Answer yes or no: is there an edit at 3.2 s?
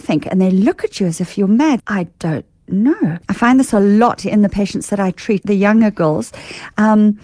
yes